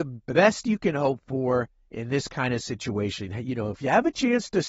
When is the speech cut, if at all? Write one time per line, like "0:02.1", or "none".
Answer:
none